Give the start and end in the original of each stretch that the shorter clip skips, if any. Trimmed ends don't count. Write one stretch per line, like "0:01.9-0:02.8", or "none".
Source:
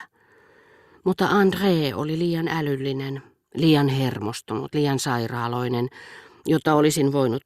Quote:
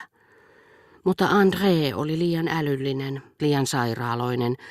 0:03.4-0:04.7